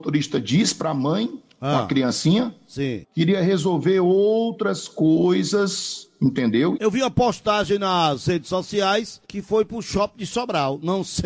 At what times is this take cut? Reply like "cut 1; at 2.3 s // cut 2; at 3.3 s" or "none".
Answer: cut 1; at 3.0 s // cut 2; at 6.8 s // cut 3; at 9.2 s